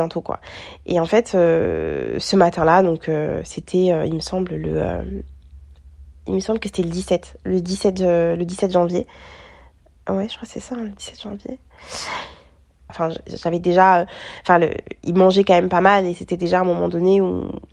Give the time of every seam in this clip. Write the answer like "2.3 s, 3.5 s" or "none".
12.9 s